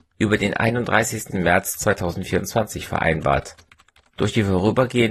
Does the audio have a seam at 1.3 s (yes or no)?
yes